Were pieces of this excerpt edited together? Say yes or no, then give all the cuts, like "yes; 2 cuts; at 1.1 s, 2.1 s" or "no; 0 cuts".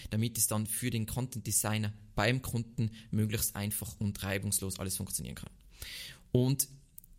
no; 0 cuts